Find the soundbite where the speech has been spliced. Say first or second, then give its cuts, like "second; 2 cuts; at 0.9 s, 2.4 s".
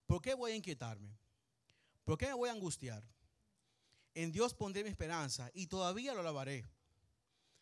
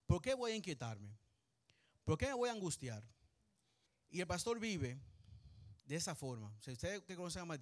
second; 2 cuts; at 3.9 s, 5.8 s